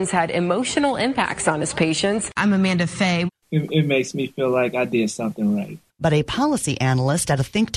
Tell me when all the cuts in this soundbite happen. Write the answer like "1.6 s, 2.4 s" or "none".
3.4 s, 5.9 s